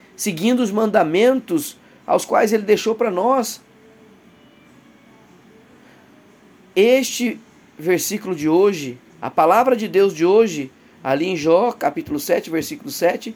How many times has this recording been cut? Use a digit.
1